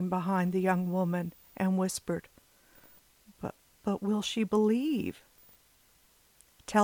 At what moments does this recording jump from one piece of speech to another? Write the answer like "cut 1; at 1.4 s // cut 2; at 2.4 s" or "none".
none